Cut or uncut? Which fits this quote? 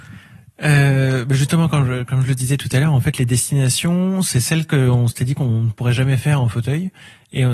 uncut